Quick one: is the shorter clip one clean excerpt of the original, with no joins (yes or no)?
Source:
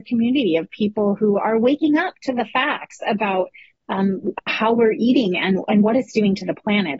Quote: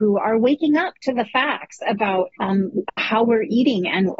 no